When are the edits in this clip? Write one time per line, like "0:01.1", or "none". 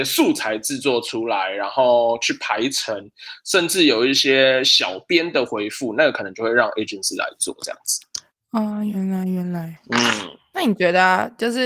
none